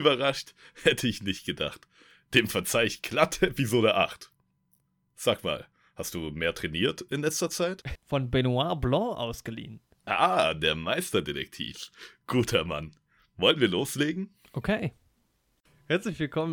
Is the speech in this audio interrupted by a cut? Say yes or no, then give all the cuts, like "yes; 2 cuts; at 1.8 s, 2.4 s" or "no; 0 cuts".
yes; 1 cut; at 8.0 s